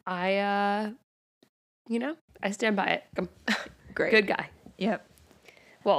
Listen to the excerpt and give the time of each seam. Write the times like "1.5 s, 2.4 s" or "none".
3.2 s